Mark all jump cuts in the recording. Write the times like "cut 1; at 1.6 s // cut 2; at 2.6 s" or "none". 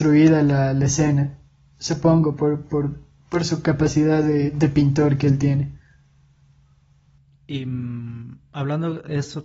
none